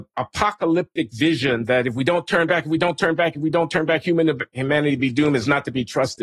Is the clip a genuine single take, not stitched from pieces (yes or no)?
yes